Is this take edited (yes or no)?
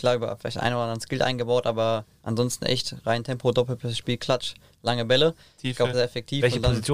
yes